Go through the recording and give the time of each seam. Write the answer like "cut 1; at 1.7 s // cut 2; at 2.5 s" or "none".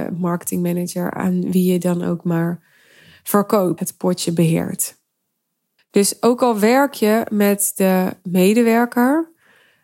cut 1; at 3.8 s // cut 2; at 5.8 s